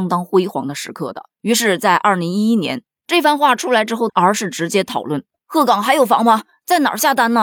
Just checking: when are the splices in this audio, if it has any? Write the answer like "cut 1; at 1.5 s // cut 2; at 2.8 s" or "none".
cut 1; at 1.3 s // cut 2; at 2.9 s // cut 3; at 4.1 s